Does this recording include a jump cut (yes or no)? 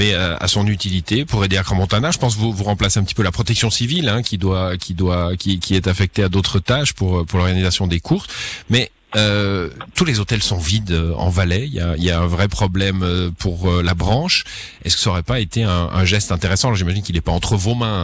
no